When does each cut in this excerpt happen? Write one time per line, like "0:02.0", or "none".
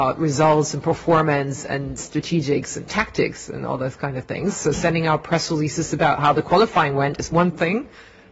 none